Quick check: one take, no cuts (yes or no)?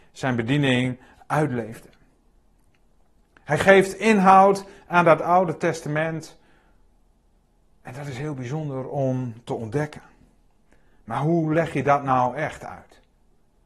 yes